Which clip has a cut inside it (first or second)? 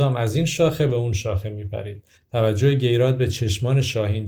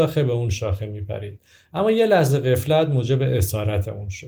first